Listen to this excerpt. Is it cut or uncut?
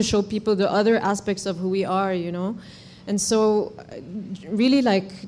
uncut